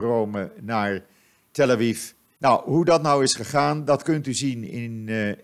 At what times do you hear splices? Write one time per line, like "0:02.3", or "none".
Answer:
0:02.4